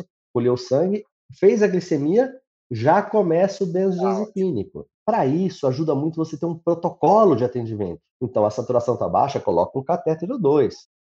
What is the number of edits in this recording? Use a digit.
2